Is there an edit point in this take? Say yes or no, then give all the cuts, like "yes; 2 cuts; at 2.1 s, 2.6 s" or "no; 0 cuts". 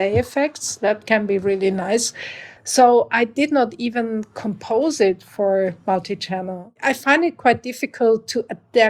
yes; 1 cut; at 2.6 s